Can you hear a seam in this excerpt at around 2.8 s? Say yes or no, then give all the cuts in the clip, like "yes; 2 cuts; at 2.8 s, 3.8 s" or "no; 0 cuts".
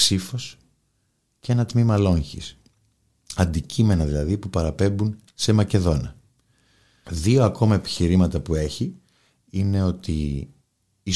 no; 1 cut; at 7.0 s